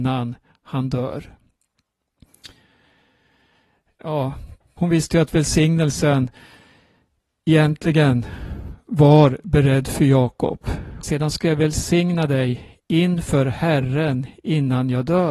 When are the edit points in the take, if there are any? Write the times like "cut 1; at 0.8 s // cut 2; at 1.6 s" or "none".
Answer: cut 1; at 4.8 s // cut 2; at 11.0 s